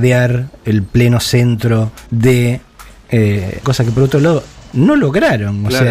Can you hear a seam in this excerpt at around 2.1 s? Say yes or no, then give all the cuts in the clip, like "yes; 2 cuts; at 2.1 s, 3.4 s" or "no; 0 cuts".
yes; 2 cuts; at 2.1 s, 3.6 s